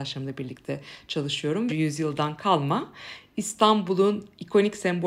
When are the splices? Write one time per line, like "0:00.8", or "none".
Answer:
0:01.7

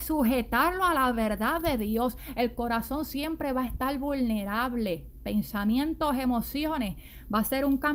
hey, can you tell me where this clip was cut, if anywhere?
none

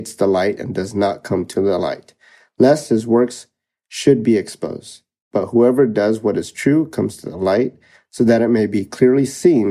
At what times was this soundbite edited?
none

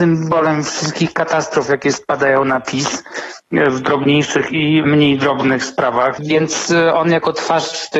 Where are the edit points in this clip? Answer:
0:06.2

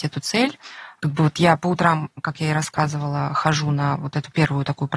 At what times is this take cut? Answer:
none

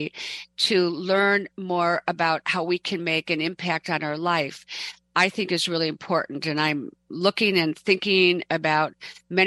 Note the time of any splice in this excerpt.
none

